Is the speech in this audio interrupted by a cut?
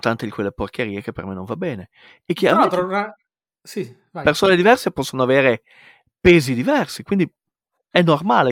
no; 0 cuts

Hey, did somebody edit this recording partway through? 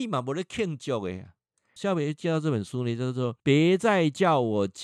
yes; 2 cuts; at 1.8 s, 3.4 s

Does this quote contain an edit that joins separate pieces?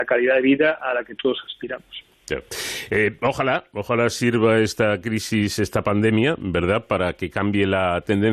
no; 0 cuts

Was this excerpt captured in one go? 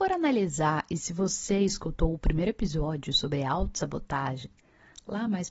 yes; 0 cuts

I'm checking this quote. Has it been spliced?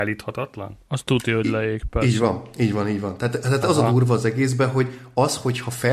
no; 0 cuts

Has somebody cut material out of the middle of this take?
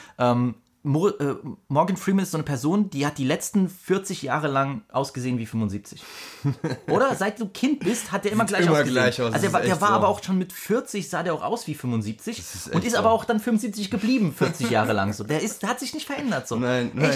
no; 0 cuts

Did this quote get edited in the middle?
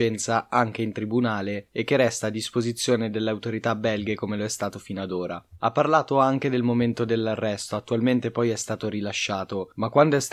no; 0 cuts

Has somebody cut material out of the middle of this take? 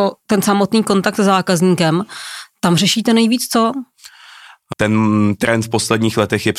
yes; 1 cut; at 4.7 s

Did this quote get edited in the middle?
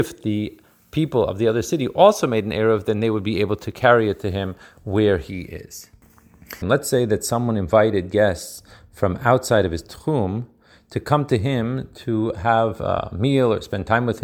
yes; 1 cut; at 6.6 s

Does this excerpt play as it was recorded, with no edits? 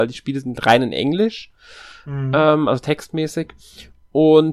yes; 0 cuts

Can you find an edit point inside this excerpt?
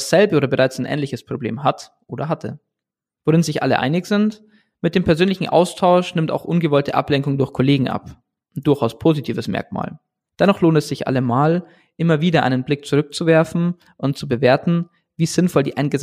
yes; 2 cuts; at 3.2 s, 10.2 s

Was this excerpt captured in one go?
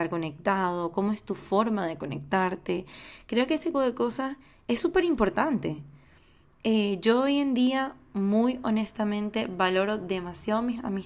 no; 1 cut; at 3.7 s

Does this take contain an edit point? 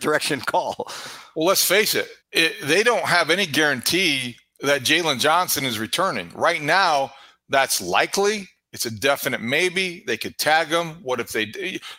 yes; 1 cut; at 2.2 s

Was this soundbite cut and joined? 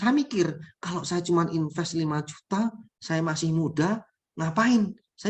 yes; 1 cut; at 2.9 s

